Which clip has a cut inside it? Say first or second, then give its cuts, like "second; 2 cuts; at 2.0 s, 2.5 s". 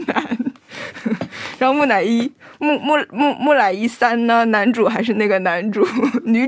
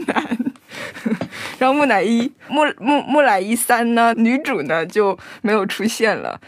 second; 2 cuts; at 2.5 s, 4.1 s